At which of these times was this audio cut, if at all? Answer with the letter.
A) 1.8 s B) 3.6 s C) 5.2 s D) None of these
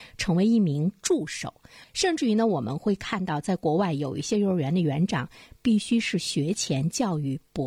A